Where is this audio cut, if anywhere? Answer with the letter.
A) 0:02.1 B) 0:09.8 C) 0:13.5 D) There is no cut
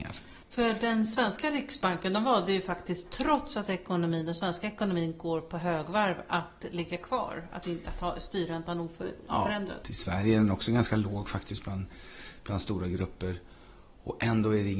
B